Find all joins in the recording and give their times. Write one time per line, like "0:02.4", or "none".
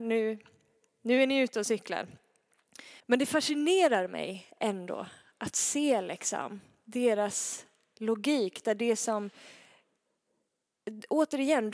0:03.0